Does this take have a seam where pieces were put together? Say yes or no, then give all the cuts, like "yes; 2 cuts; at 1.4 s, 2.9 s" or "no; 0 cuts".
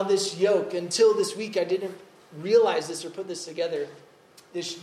no; 0 cuts